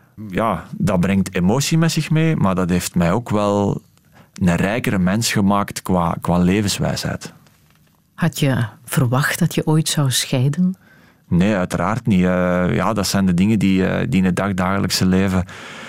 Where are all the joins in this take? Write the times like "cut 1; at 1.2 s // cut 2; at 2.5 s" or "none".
cut 1; at 6.2 s